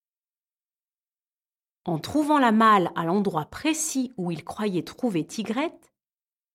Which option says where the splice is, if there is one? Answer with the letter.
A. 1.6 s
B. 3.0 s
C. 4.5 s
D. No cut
D